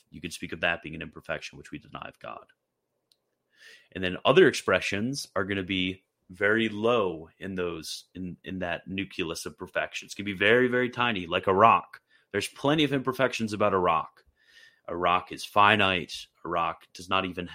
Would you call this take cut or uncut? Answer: uncut